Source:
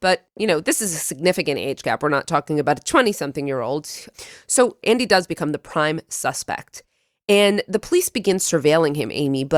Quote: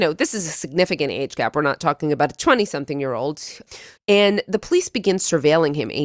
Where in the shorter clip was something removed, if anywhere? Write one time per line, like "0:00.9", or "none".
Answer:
0:04.0